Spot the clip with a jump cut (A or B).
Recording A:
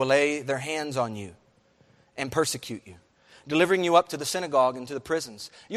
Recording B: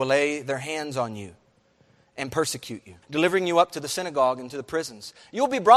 B